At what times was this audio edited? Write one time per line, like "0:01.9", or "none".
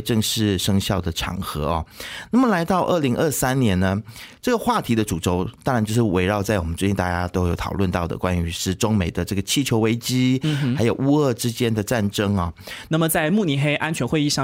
0:12.9